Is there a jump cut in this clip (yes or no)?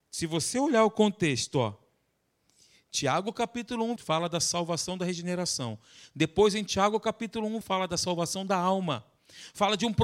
yes